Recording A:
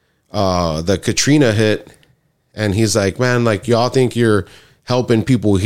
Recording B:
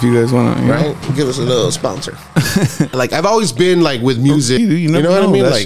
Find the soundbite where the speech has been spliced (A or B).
B